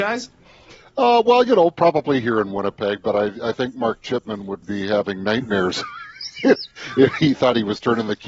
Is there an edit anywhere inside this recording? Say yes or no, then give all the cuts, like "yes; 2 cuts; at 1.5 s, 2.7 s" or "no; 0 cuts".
yes; 1 cut; at 4.6 s